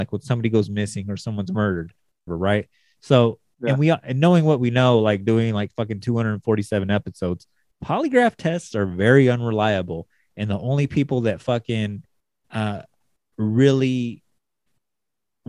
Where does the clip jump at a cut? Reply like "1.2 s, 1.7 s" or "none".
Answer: 2.3 s